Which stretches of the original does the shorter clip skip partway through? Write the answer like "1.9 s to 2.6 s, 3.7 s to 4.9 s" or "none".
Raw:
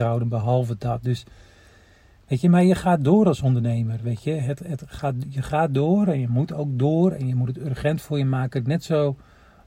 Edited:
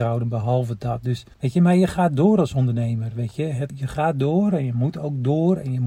1.3 s to 2.2 s, 4.6 s to 5.2 s